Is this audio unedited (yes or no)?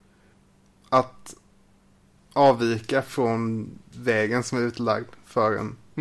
yes